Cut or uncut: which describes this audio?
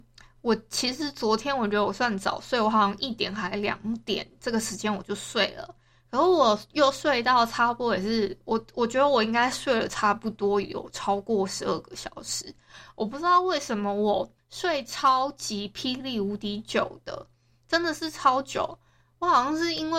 uncut